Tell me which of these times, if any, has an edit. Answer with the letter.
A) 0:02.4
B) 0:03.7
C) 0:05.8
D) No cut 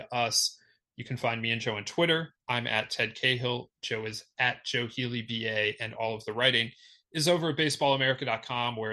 D